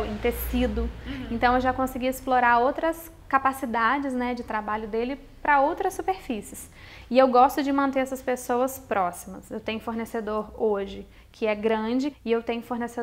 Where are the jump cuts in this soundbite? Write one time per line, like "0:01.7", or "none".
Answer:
0:12.1